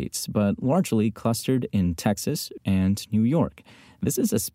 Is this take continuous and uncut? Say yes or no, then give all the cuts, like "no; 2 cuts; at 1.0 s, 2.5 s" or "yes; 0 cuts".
no; 1 cut; at 2.6 s